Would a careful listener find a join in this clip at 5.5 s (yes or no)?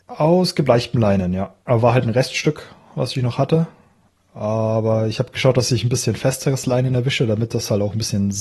no